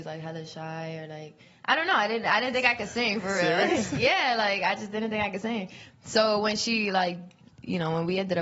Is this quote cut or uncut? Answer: uncut